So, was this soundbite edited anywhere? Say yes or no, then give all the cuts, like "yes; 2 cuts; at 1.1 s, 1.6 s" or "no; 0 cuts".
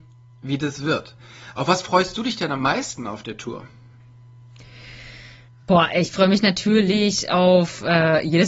no; 0 cuts